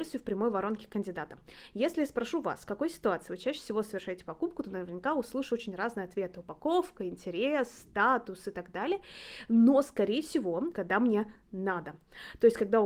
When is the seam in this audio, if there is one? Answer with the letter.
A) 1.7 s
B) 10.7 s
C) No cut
B